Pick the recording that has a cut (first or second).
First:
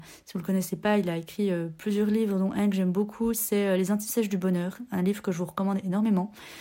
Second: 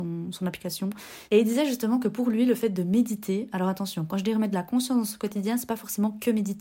second